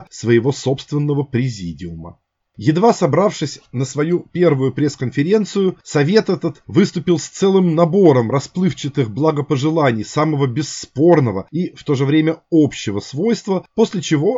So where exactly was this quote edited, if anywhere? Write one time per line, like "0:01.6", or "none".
0:02.4